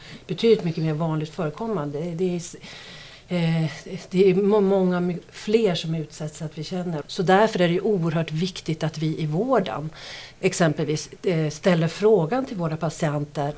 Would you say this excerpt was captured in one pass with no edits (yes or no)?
no